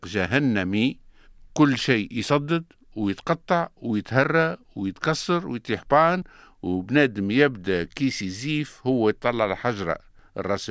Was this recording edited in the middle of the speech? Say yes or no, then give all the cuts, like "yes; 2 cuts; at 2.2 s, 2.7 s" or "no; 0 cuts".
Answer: no; 0 cuts